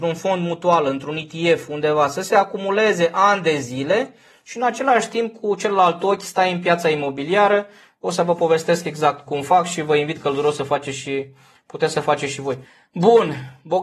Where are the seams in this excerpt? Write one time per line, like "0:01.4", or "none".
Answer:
0:09.3